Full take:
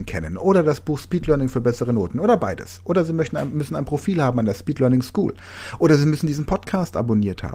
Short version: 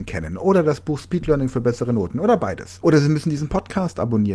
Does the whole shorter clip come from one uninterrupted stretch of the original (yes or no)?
no